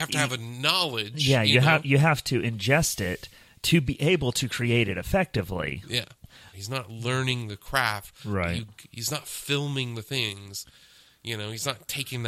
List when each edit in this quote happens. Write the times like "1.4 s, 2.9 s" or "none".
6.5 s